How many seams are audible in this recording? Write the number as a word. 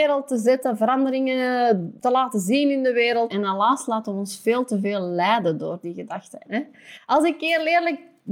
two